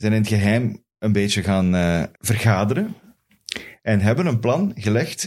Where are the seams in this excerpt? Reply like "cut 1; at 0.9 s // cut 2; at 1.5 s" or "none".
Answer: cut 1; at 2.2 s